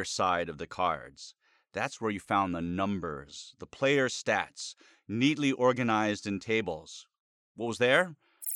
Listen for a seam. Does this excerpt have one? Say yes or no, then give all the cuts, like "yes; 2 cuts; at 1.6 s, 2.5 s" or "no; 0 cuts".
no; 0 cuts